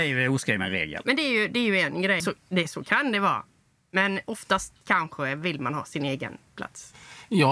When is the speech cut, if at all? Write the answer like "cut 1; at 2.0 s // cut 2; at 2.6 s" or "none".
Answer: cut 1; at 2.2 s